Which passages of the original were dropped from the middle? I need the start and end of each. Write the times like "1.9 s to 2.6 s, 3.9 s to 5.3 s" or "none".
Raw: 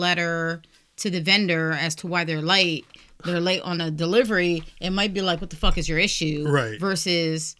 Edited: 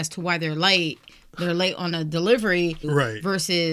4.7 s to 6.4 s